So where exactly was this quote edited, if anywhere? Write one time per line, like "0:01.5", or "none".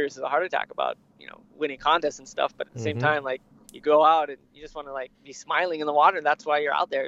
0:03.6
0:05.1